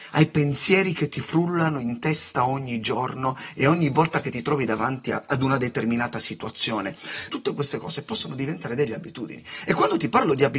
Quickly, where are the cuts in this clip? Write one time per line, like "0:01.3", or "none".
0:07.3